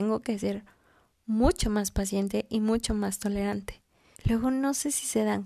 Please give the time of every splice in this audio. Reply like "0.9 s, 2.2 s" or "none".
4.2 s